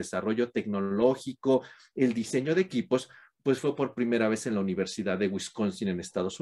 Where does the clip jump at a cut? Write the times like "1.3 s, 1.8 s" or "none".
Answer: none